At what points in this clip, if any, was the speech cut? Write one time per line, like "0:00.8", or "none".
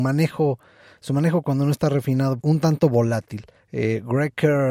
0:02.4
0:03.6